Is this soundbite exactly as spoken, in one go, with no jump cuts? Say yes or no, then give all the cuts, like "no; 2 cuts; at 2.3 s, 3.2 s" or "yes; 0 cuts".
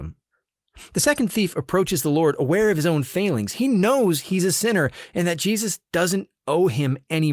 yes; 0 cuts